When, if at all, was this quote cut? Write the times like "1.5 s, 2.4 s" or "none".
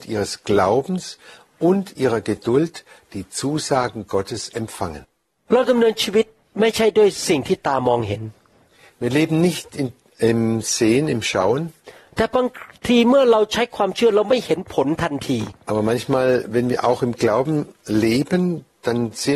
12.1 s